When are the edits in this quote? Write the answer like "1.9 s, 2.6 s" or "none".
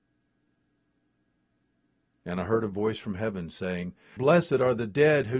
4.2 s